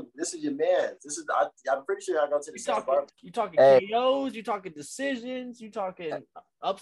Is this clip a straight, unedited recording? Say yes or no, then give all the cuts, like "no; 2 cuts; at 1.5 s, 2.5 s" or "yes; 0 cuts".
no; 1 cut; at 3.1 s